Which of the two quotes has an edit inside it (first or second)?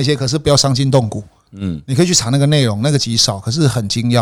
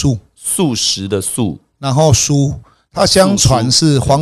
first